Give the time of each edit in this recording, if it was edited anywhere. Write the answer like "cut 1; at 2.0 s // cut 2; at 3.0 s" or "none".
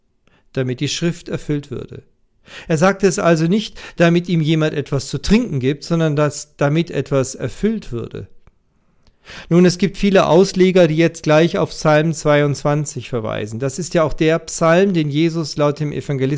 none